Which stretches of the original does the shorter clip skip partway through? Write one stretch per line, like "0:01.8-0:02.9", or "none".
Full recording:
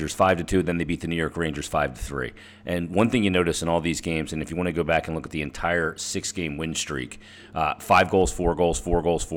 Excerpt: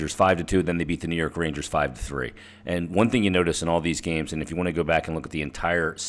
none